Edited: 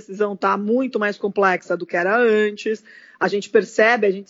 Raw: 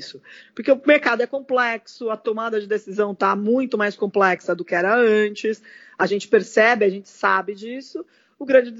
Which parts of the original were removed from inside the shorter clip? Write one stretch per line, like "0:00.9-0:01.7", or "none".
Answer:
none